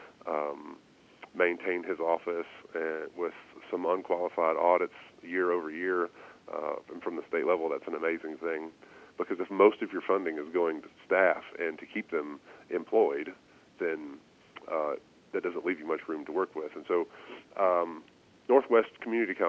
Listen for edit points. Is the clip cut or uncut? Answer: cut